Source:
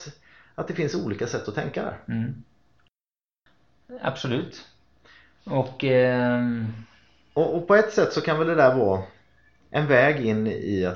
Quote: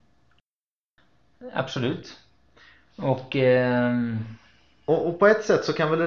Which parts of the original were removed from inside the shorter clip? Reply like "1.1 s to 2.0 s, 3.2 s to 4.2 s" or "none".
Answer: none